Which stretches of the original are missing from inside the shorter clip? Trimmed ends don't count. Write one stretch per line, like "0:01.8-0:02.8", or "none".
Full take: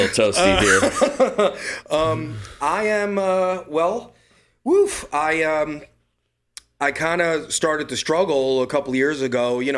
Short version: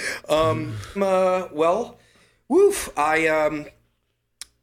0:02.6-0:03.1